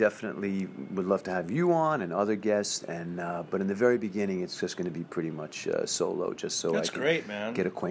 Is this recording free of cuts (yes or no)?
yes